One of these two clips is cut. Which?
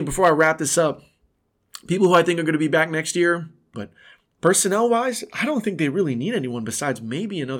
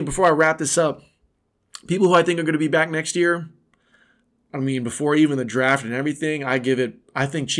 first; 1 cut; at 3.7 s

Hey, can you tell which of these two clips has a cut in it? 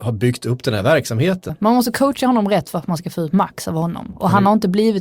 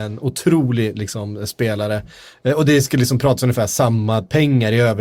first; 1 cut; at 1.5 s

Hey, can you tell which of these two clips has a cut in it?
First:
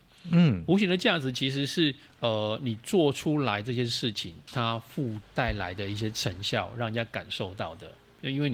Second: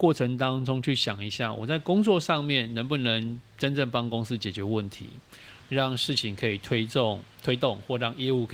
first; 1 cut; at 5.2 s

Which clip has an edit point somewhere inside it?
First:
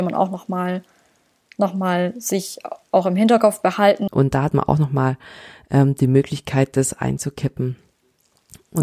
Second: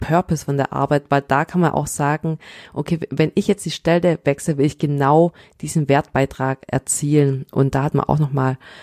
first; 1 cut; at 4.1 s

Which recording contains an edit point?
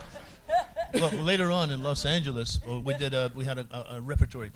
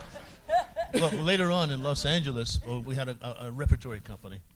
second; 1 cut; at 2.8 s

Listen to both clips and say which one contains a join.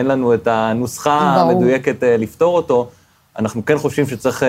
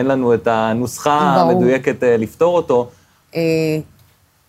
second; 1 cut; at 3.2 s

